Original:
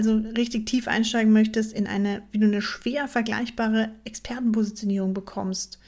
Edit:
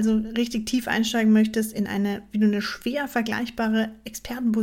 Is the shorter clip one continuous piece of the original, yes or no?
yes